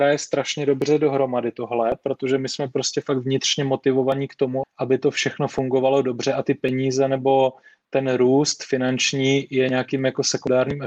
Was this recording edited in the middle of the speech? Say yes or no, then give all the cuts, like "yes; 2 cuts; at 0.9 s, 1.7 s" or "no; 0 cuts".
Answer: yes; 1 cut; at 4.6 s